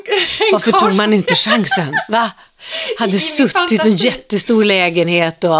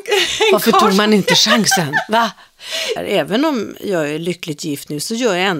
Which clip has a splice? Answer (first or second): second